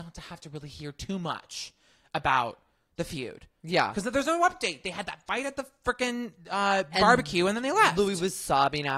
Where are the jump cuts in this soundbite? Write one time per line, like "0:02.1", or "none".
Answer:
none